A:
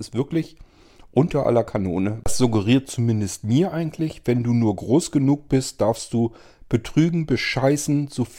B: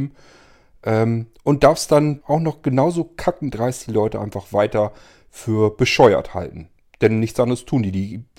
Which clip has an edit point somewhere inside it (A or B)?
B